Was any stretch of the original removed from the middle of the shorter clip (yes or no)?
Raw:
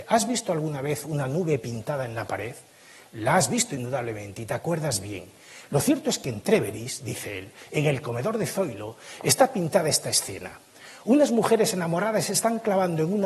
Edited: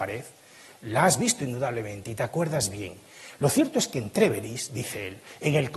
no